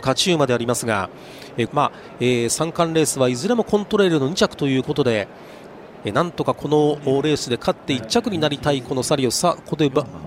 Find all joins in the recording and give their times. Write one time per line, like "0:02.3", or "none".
0:01.7
0:06.0